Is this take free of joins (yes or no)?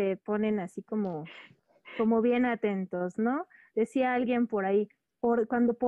yes